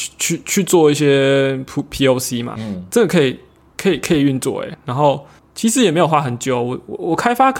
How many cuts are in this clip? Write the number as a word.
one